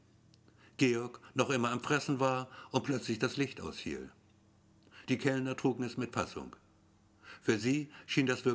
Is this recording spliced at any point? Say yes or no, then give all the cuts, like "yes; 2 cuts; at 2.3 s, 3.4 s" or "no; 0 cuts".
no; 0 cuts